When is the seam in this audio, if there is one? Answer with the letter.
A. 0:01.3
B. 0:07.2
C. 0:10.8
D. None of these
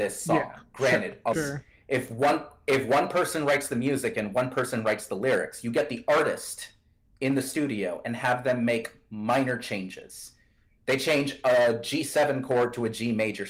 A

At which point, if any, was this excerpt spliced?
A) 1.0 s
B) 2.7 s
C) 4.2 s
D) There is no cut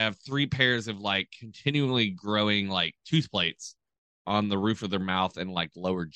D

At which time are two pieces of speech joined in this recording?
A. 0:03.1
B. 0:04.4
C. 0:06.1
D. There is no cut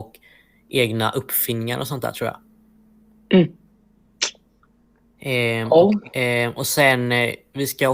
C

